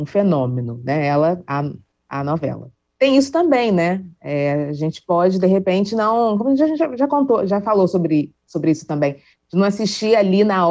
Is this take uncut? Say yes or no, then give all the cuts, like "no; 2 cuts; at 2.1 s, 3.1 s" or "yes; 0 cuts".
yes; 0 cuts